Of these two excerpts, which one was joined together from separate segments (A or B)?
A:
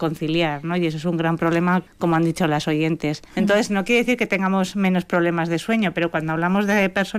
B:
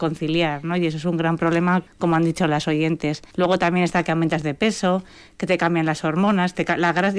A